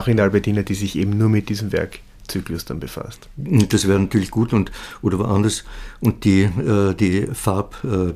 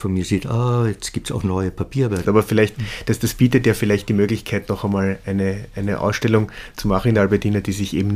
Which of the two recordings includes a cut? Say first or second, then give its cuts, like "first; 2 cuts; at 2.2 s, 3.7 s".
second; 1 cut; at 2.2 s